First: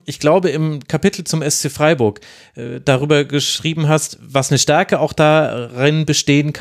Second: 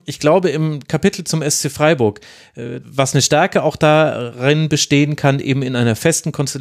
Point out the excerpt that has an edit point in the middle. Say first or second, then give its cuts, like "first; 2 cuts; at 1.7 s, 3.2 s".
second; 1 cut; at 2.8 s